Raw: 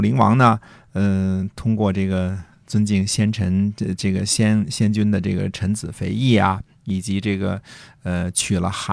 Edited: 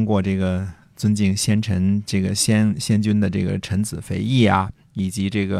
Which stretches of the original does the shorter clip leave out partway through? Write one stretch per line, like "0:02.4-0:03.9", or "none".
0:03.7-0:04.0

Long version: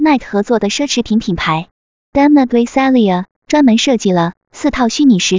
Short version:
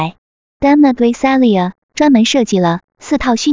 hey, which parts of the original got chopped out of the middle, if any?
none

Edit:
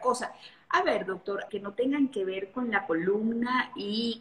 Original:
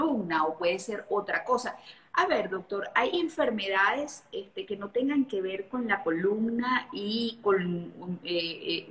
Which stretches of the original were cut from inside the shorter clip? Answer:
0:02.9-0:04.7

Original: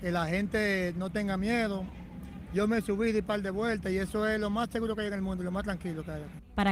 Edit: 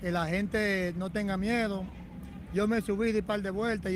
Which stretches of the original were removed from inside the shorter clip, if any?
none

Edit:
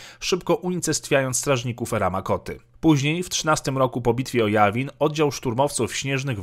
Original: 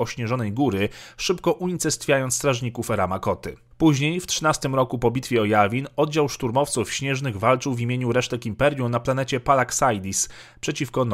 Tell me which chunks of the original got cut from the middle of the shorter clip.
none

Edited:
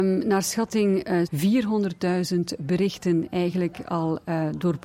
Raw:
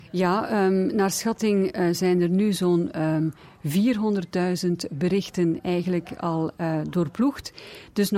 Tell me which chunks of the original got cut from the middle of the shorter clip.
0:01.9-0:03.6

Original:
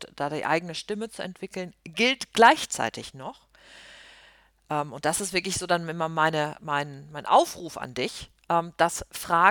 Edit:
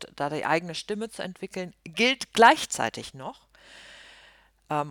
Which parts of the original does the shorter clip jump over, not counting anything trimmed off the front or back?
none

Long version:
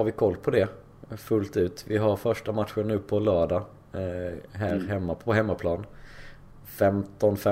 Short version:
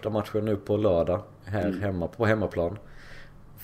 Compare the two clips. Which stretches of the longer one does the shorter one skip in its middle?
0:03.8-0:04.5

